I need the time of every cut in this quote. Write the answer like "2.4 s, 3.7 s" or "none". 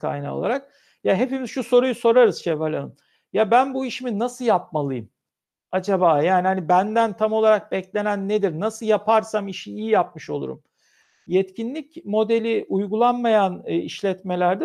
none